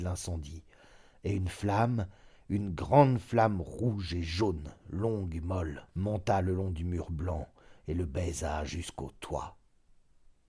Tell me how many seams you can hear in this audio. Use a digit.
1